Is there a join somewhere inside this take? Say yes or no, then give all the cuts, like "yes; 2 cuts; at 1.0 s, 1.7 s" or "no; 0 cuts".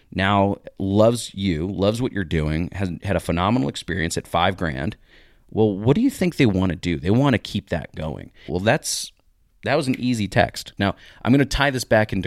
yes; 2 cuts; at 8.5 s, 10.8 s